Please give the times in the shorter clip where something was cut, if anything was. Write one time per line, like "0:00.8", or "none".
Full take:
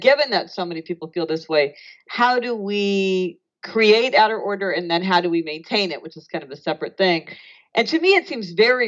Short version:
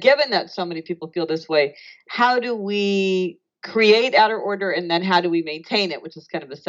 none